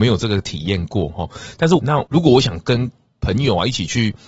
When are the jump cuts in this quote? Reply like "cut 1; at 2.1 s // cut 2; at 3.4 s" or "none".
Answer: cut 1; at 1.8 s